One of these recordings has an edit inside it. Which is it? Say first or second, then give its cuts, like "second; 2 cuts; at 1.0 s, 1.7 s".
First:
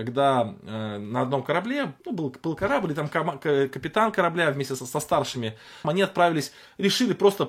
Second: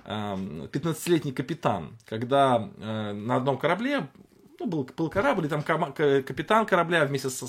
first; 3 cuts; at 2.0 s, 4.8 s, 5.8 s